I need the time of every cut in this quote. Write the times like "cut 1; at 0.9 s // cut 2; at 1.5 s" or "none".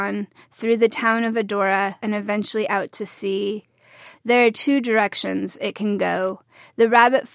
cut 1; at 2.0 s // cut 2; at 4.1 s